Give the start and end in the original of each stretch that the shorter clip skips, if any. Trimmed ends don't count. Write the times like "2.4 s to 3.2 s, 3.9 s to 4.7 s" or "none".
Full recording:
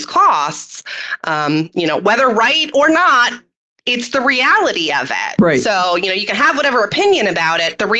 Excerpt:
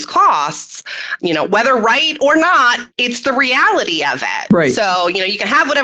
1.2 s to 1.7 s, 3.4 s to 3.8 s